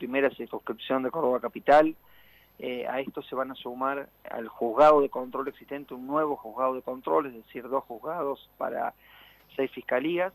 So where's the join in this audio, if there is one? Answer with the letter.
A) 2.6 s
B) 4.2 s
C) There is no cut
B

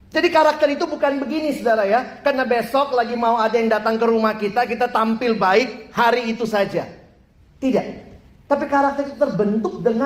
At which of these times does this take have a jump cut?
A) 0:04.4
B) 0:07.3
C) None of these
C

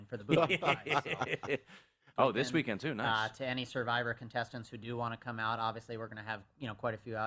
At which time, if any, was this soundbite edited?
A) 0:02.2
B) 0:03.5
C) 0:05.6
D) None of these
A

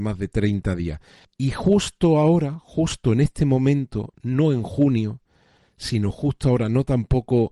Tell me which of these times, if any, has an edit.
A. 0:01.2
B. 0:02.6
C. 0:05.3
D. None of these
A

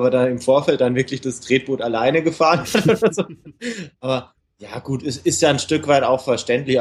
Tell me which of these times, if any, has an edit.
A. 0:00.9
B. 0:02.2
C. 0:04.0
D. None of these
D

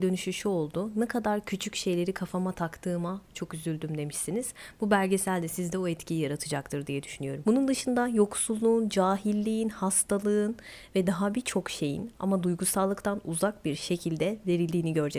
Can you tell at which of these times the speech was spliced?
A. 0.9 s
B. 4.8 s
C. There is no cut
C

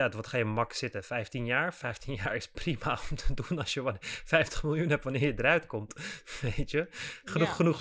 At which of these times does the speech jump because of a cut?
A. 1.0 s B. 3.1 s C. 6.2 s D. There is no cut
D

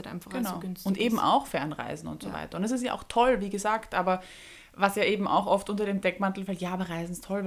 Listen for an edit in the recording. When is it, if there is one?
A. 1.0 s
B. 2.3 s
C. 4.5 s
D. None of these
D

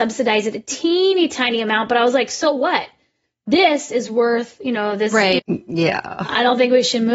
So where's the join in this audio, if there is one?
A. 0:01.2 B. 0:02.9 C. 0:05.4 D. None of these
C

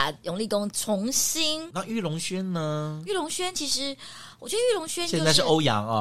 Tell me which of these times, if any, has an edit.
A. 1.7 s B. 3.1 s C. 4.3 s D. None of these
A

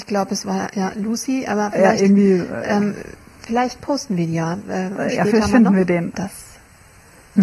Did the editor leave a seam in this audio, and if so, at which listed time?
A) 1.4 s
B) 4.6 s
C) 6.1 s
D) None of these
C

